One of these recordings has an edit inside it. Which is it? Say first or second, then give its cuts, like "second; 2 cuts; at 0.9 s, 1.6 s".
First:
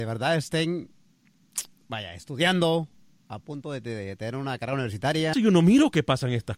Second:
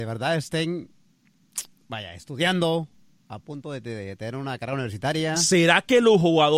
first; 1 cut; at 5.3 s